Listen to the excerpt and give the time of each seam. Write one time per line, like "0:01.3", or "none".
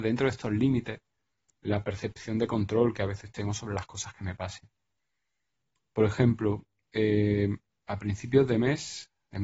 none